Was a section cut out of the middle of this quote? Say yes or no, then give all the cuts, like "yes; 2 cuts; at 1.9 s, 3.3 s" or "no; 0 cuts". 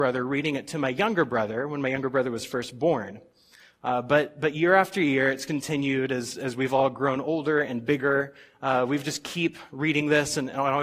no; 0 cuts